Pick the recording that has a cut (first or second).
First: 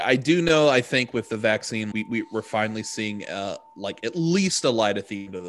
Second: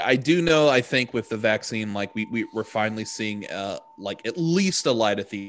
first